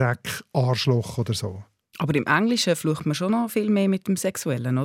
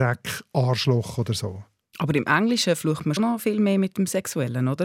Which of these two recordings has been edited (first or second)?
second